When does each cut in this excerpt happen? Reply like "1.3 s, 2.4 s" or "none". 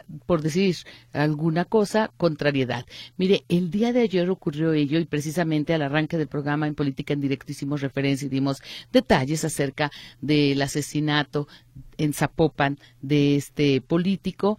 3.4 s